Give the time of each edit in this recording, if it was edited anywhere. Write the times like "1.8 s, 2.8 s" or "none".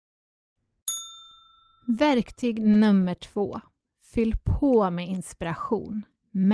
none